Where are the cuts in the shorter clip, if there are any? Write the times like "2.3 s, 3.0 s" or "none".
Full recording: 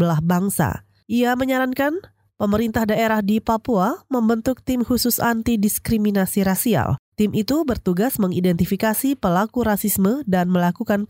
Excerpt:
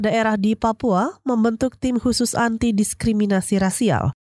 none